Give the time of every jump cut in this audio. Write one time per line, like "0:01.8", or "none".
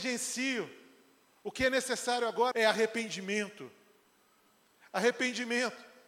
0:02.5

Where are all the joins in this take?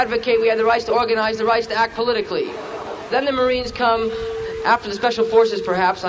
0:03.1

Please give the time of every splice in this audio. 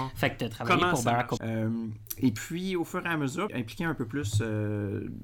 0:01.4
0:03.5

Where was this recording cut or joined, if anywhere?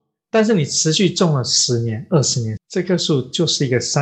0:02.6

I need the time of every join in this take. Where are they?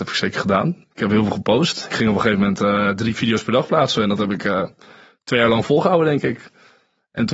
none

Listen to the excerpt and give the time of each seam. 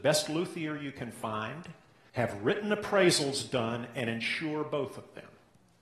0:02.1

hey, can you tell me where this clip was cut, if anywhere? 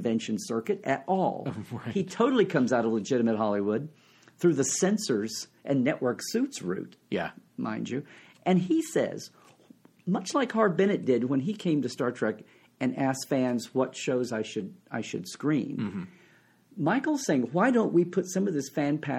none

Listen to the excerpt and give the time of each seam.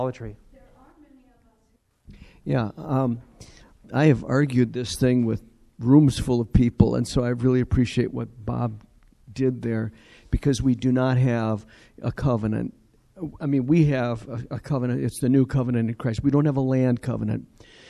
none

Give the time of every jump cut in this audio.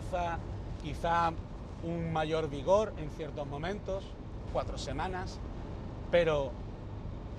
0:04.5

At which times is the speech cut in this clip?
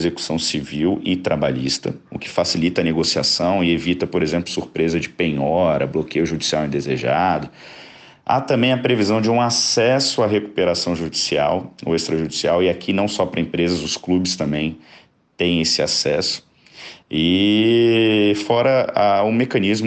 none

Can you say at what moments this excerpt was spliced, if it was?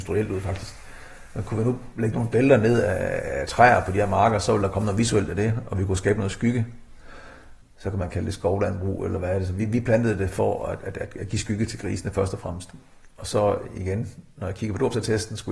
none

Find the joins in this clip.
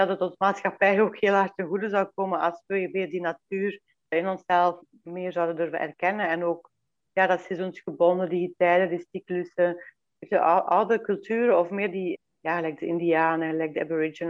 none

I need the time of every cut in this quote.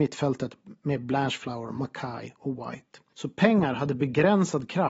0:03.1

